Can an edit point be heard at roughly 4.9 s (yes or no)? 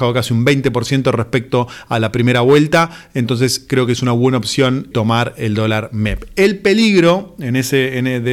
yes